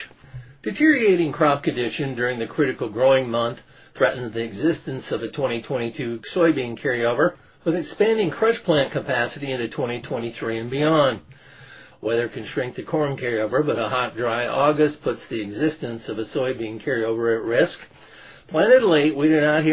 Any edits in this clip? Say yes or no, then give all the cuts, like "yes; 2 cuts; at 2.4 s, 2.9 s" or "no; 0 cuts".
yes; 1 cut; at 11.9 s